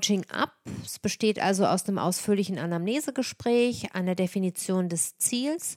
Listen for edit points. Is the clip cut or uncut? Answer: cut